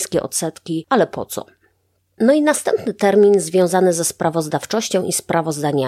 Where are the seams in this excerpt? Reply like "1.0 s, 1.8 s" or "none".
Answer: none